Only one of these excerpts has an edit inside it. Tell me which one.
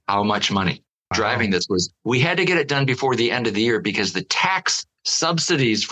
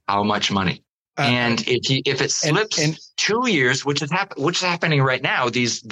first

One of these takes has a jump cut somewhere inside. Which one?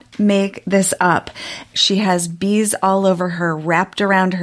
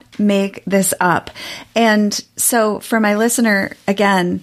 first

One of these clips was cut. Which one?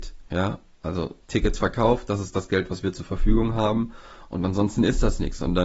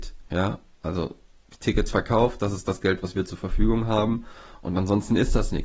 first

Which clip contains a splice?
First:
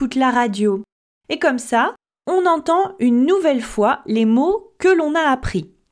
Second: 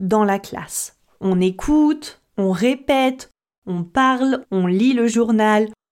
second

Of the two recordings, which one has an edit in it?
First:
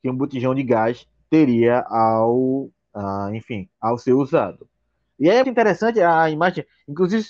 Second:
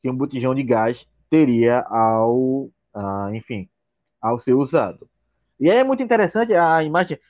first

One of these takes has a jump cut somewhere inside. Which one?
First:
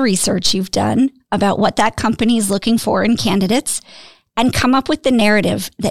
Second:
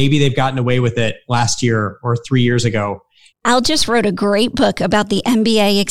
second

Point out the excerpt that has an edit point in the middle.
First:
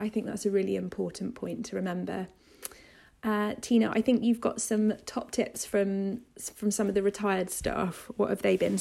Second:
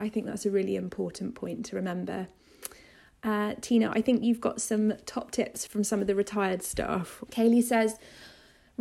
second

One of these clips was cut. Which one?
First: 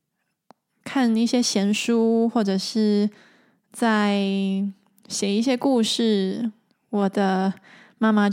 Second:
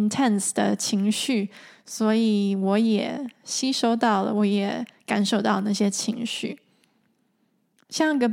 first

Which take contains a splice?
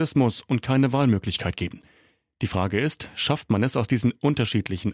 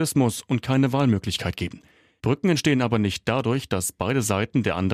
second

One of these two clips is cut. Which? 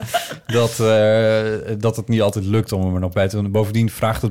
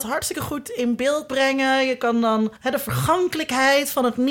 second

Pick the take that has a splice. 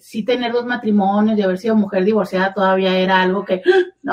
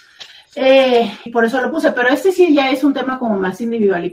second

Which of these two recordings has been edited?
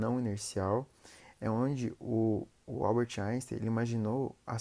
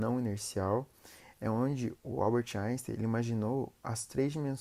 second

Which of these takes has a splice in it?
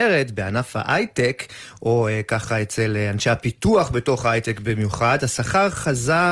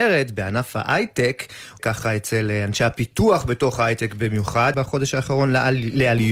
second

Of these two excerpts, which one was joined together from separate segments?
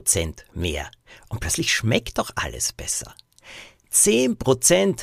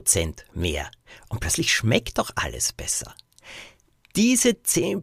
first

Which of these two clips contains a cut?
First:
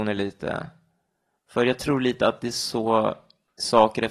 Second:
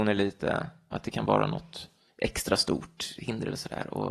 second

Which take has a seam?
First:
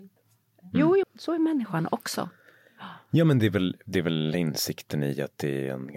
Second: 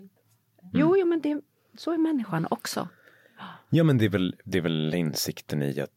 first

